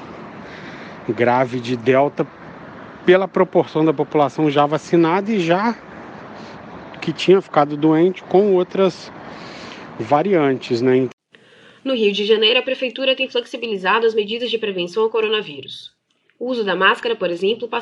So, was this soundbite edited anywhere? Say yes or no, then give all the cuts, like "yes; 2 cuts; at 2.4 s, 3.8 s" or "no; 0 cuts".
no; 0 cuts